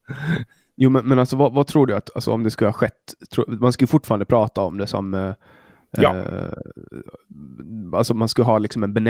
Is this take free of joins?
yes; 0 cuts

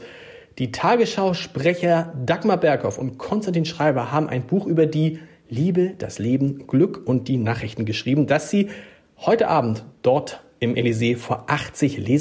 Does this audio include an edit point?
no; 0 cuts

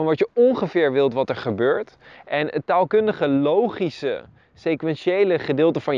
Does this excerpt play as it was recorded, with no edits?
no; 1 cut; at 2.1 s

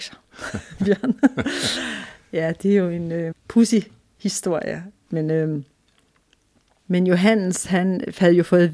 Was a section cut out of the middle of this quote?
yes; 2 cuts; at 3.3 s, 5.1 s

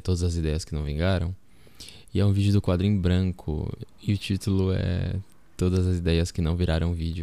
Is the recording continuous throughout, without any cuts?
no; 1 cut; at 3.9 s

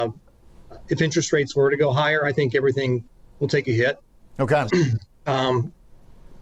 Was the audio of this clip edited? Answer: yes; 1 cut; at 4.7 s

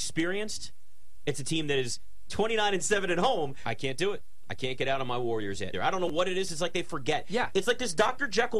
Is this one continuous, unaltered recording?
no; 2 cuts; at 3.6 s, 5.7 s

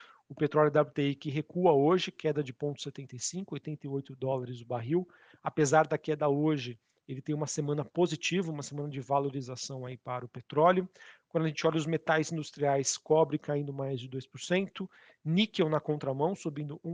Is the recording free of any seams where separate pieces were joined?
yes; 0 cuts

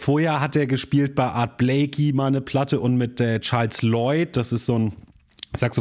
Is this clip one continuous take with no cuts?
yes; 0 cuts

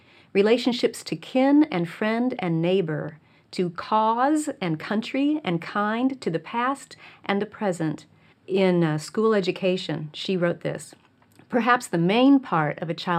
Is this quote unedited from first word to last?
no; 1 cut; at 8.3 s

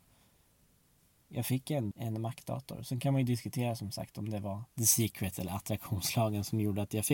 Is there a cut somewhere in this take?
yes; 2 cuts; at 1.9 s, 4.7 s

